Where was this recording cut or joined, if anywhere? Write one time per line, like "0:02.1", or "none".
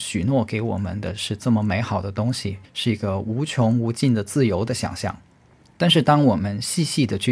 none